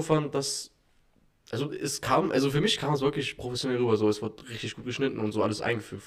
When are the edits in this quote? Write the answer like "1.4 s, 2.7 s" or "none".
none